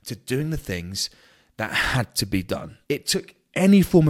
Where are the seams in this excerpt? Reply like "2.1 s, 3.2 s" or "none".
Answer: 2.8 s

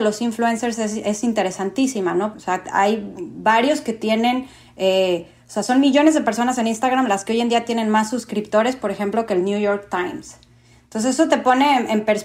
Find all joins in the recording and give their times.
2.3 s

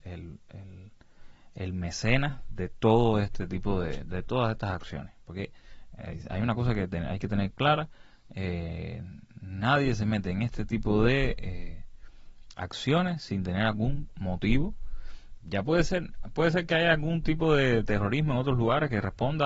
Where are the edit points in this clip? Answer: none

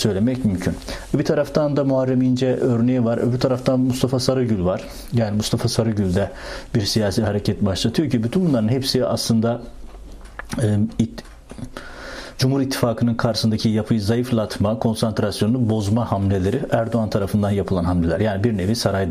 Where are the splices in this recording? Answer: none

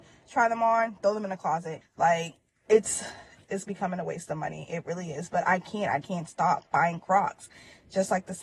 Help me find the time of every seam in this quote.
1.8 s, 6.0 s

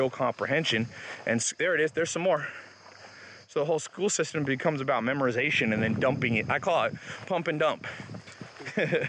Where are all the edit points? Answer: none

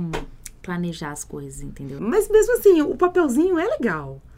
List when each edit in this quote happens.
2.0 s

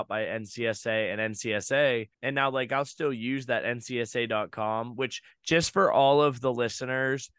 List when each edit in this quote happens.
2.1 s

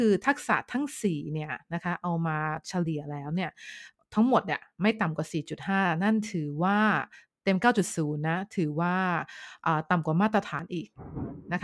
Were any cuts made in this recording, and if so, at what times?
none

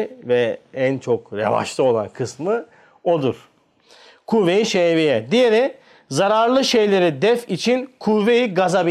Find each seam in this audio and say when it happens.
none

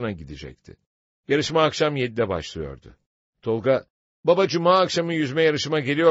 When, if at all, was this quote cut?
none

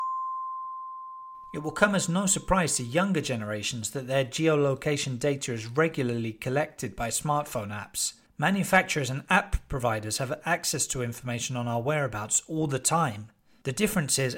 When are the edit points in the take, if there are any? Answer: none

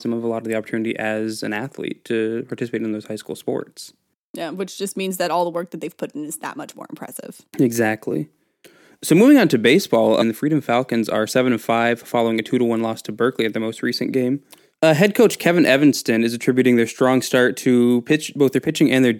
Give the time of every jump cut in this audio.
10.2 s

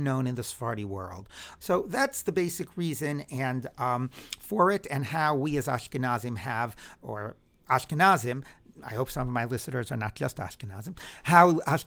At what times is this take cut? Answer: 1.6 s

